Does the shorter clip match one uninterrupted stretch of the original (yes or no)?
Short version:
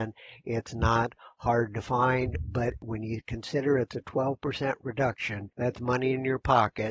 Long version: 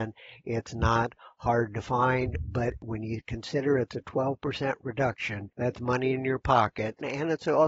yes